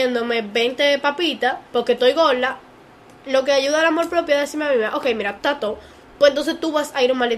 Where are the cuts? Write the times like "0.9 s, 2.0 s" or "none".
1.7 s, 5.4 s